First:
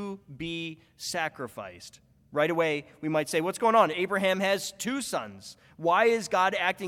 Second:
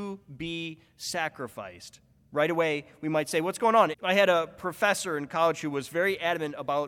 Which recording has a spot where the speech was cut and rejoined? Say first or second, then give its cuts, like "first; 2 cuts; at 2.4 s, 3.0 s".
second; 1 cut; at 3.9 s